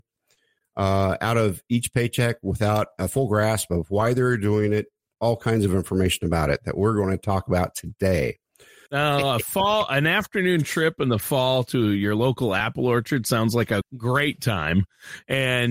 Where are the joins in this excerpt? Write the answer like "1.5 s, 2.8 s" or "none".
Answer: 5.1 s, 8.9 s, 13.8 s